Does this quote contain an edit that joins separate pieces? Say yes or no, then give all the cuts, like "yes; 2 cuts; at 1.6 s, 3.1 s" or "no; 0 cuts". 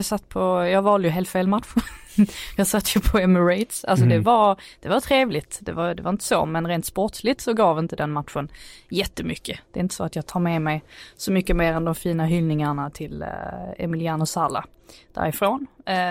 no; 0 cuts